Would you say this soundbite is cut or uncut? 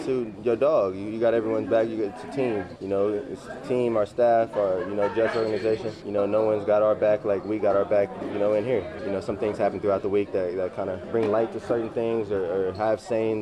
uncut